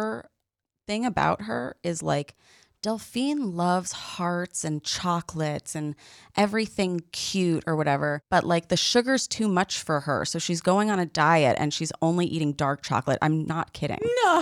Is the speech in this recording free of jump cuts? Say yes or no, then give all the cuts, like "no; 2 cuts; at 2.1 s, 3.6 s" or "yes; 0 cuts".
yes; 0 cuts